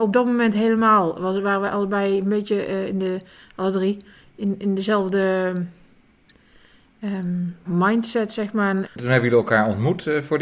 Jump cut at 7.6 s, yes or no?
yes